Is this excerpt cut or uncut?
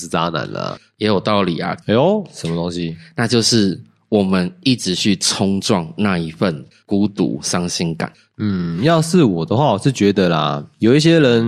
cut